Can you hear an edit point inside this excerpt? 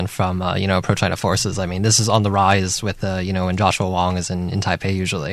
no; 0 cuts

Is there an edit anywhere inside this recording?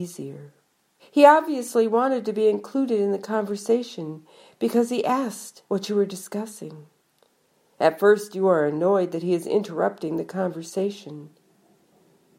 yes; 2 cuts; at 1.0 s, 5.6 s

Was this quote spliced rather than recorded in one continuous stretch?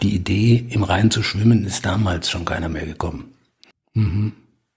yes; 1 cut; at 3.7 s

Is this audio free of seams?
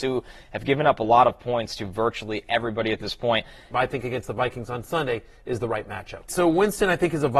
no; 2 cuts; at 3.7 s, 6.3 s

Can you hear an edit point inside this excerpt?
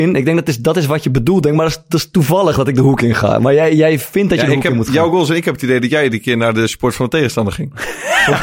no; 0 cuts

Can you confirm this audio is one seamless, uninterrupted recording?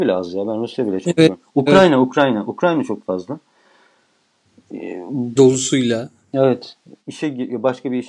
no; 2 cuts; at 5.4 s, 7.0 s

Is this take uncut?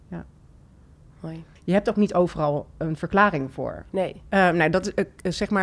no; 2 cuts; at 1.6 s, 4.3 s

